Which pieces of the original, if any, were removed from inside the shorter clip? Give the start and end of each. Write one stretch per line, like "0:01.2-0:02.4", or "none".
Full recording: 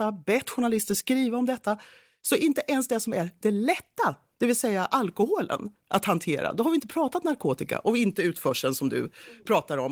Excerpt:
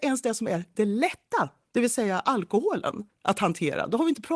none